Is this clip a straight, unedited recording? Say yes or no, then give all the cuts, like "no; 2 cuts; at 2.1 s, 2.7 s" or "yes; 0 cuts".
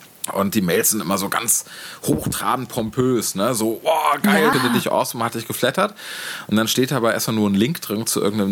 no; 1 cut; at 4.5 s